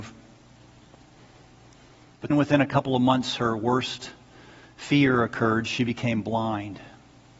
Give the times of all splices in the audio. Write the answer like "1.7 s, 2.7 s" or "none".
2.3 s